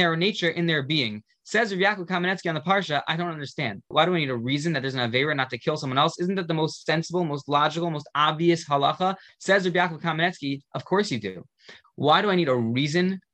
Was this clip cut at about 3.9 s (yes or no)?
yes